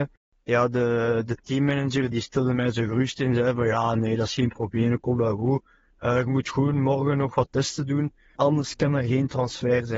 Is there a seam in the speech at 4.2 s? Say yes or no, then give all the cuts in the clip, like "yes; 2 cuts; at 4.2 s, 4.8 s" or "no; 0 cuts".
no; 2 cuts; at 2.1 s, 8.4 s